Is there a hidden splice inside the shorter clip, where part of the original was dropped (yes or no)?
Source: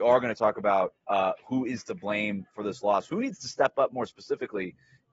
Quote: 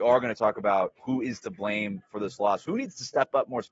yes